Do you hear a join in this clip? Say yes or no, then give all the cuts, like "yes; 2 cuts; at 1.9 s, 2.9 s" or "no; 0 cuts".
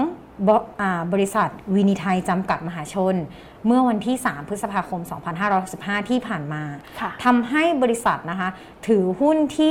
no; 0 cuts